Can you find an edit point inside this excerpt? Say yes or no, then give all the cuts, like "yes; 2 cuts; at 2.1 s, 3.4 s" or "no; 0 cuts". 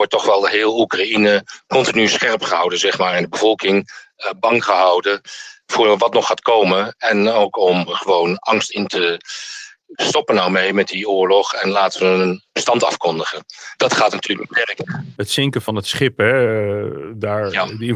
yes; 1 cut; at 9.9 s